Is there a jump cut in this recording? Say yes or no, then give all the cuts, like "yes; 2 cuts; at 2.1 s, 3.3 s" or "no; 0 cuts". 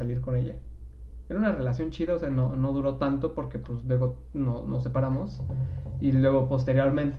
no; 0 cuts